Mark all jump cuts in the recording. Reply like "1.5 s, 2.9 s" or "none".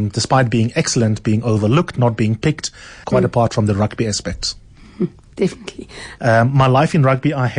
3.0 s, 6.2 s